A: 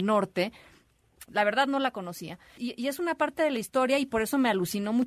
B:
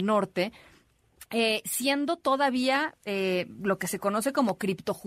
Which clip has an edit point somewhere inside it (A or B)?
A